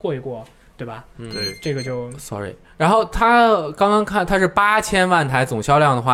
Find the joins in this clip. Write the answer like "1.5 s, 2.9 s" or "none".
none